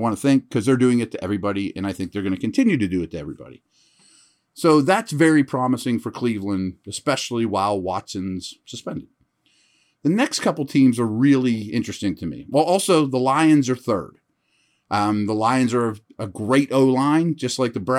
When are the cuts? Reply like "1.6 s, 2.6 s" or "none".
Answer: none